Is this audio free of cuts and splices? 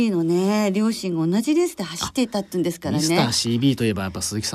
yes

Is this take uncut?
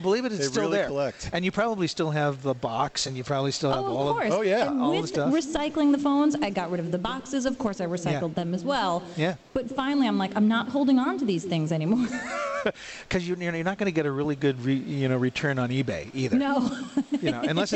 yes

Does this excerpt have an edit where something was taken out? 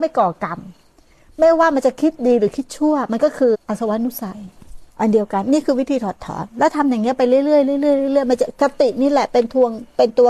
yes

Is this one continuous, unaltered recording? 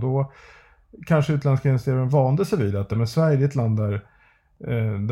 yes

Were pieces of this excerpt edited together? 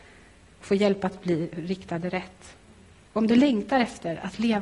yes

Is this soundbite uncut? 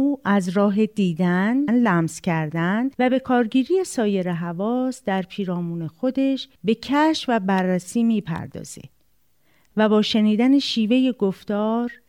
no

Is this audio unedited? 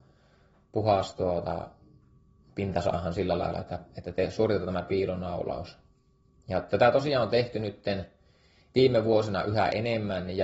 yes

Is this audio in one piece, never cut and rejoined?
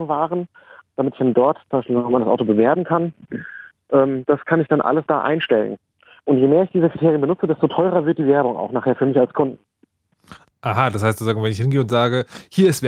yes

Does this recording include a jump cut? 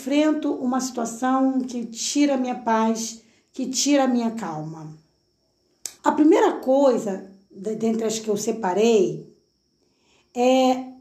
yes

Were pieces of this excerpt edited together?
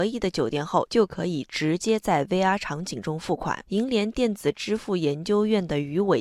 no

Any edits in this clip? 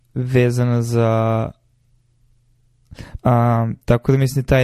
yes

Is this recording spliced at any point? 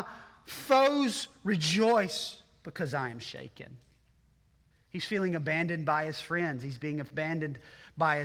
yes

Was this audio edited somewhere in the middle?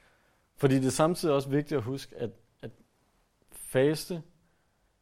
no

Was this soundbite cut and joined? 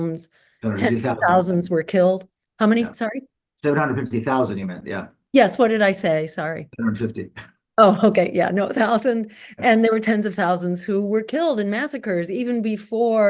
no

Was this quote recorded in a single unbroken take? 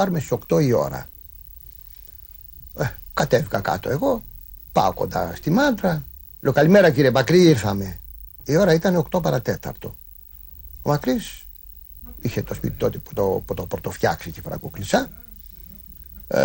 yes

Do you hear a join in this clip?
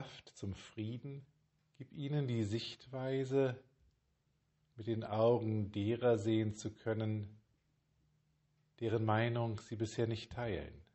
yes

